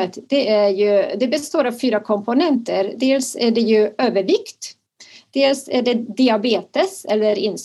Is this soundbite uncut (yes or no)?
yes